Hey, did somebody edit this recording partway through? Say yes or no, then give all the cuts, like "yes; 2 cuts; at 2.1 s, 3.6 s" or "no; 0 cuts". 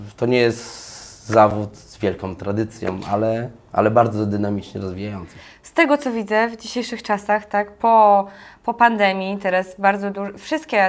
no; 0 cuts